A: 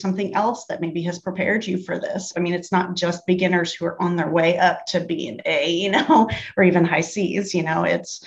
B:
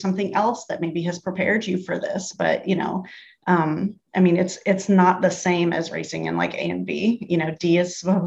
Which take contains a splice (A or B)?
A